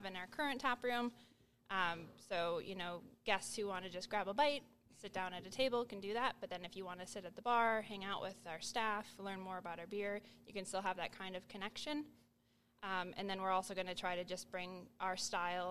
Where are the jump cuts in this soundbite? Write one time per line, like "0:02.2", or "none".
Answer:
none